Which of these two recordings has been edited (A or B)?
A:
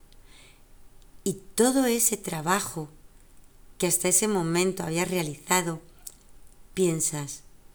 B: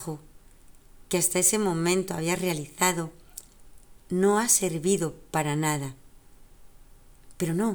B